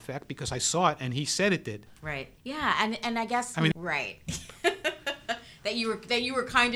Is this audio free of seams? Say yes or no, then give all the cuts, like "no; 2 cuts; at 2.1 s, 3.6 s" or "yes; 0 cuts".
no; 2 cuts; at 2.4 s, 3.7 s